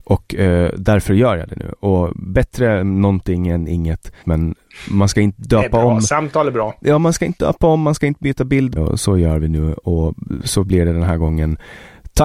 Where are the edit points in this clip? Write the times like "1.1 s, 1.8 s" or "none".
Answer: 4.2 s, 8.8 s